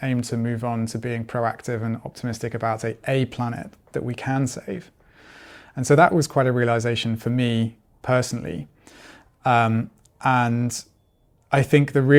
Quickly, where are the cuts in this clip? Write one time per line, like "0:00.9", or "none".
none